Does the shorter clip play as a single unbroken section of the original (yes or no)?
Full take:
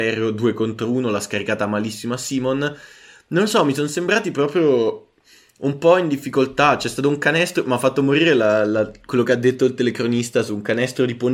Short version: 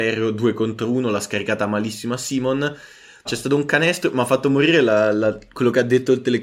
no